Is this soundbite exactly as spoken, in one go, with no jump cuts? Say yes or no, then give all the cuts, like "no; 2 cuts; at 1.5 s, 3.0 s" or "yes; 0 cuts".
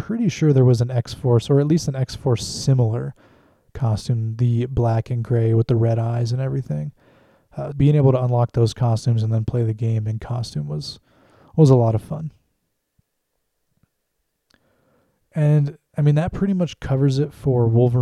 no; 1 cut; at 7.7 s